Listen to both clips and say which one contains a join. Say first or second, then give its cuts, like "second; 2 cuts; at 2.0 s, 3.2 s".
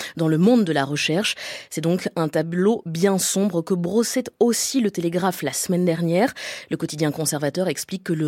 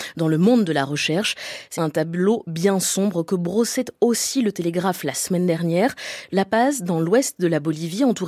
second; 2 cuts; at 1.7 s, 6.3 s